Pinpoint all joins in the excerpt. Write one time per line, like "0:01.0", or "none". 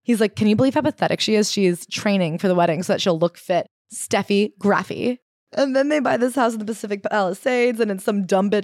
0:03.8